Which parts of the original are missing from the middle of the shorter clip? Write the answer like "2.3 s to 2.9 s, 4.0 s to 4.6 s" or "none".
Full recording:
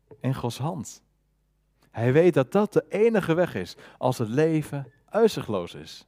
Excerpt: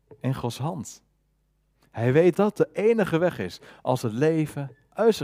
2.3 s to 2.5 s